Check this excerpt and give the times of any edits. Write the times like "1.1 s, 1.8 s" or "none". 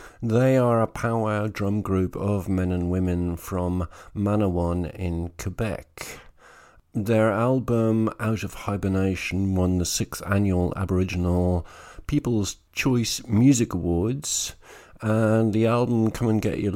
none